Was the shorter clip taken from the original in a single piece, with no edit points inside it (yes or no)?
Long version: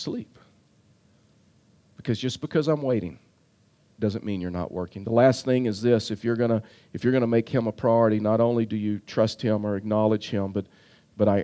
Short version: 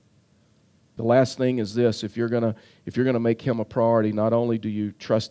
no